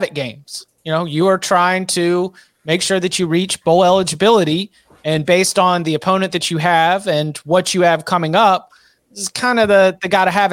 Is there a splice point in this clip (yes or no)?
no